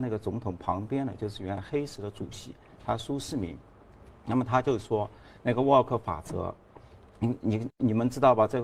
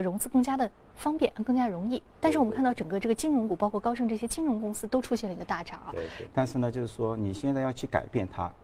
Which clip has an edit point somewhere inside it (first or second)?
second